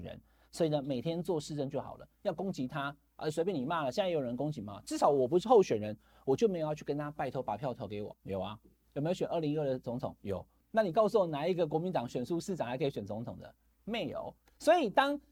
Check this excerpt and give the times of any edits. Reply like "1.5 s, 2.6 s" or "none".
8.1 s